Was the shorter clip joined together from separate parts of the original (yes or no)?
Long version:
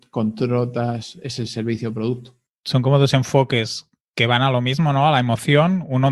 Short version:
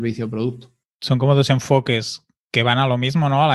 no